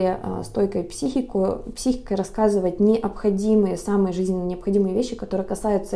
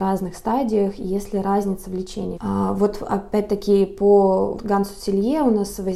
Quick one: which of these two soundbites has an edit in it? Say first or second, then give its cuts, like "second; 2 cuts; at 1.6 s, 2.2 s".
second; 2 cuts; at 2.3 s, 4.6 s